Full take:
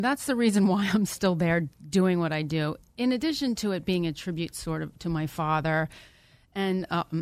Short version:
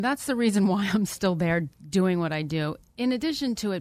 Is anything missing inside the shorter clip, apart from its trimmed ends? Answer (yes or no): no